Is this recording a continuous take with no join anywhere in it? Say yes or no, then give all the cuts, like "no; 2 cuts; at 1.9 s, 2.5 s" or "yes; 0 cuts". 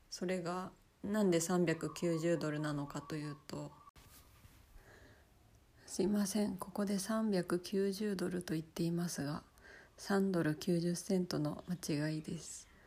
yes; 0 cuts